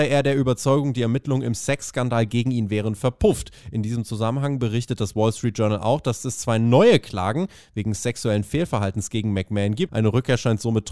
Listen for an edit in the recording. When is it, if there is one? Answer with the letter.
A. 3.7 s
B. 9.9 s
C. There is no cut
B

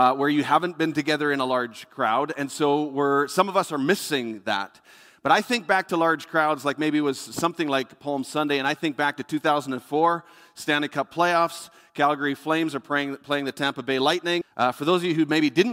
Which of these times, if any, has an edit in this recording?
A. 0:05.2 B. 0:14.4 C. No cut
B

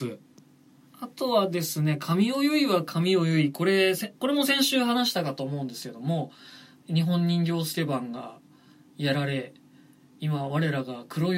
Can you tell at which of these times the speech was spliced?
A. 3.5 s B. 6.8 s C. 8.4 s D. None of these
B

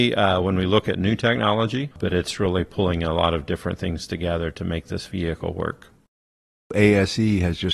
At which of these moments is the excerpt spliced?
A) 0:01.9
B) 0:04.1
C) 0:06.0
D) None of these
A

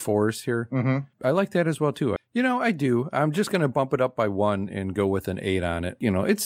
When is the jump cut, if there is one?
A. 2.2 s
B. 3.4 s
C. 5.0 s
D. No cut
A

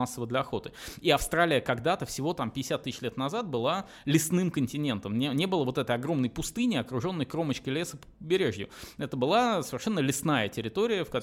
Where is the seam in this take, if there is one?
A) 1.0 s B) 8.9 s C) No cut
C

